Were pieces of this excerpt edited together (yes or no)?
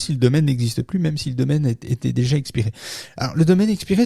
no